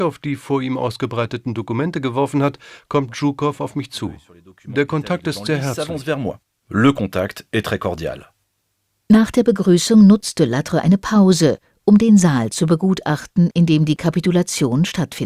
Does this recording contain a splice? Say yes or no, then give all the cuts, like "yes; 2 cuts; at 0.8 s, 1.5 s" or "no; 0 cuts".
no; 0 cuts